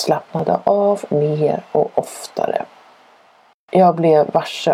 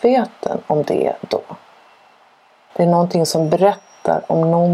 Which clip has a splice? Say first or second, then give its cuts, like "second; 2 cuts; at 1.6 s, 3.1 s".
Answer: second; 1 cut; at 2.7 s